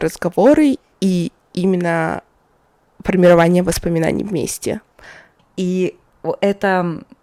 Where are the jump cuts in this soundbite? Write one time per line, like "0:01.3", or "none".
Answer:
0:05.4